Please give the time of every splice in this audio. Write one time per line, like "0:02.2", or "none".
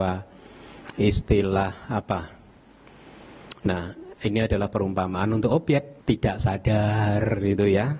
0:03.6
0:06.0